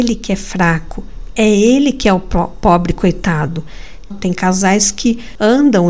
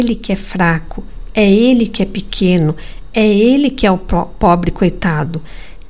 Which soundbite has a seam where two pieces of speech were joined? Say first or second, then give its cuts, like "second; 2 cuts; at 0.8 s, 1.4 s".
first; 2 cuts; at 1.3 s, 4.1 s